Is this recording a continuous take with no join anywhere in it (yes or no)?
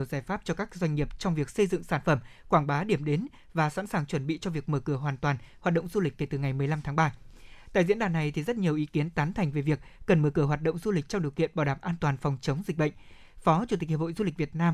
yes